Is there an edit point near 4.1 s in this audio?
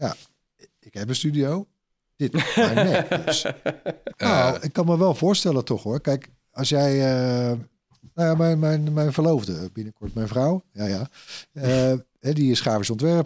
yes; 1 cut; at 4.1 s

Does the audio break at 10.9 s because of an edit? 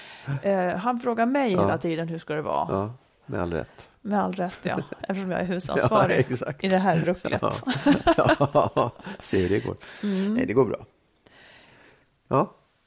no; 0 cuts

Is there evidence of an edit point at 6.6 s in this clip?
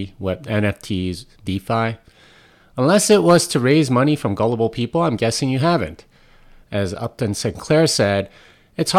yes; 1 cut; at 6.6 s

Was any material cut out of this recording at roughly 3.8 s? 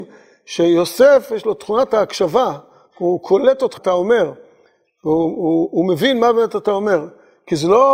yes; 1 cut; at 3.8 s

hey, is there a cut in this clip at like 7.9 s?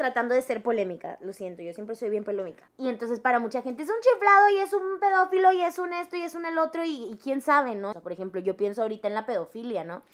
yes; 2 cuts; at 2.7 s, 7.9 s

